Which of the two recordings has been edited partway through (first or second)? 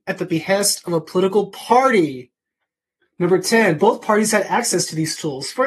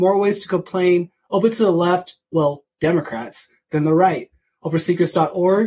first